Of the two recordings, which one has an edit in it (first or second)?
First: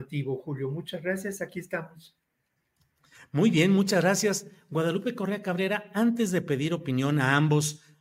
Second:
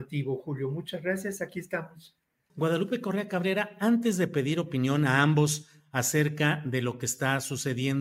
second